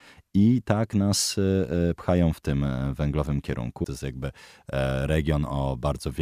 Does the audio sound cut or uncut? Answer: cut